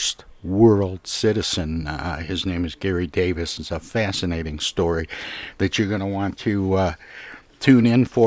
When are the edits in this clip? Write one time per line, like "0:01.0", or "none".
none